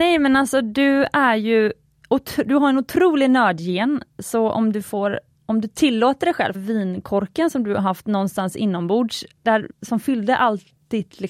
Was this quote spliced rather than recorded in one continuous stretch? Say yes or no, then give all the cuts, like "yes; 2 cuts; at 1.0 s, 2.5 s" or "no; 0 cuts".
yes; 2 cuts; at 6.5 s, 9.7 s